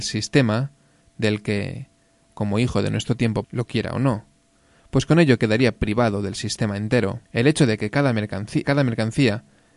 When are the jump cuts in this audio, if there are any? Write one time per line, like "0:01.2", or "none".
0:03.4
0:07.3
0:08.6